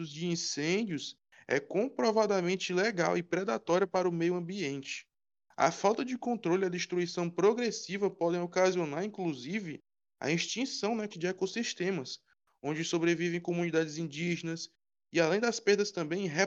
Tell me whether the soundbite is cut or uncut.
cut